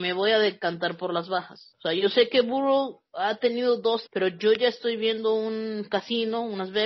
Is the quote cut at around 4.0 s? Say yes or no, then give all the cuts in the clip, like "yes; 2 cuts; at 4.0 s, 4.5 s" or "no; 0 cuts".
yes; 2 cuts; at 1.7 s, 4.0 s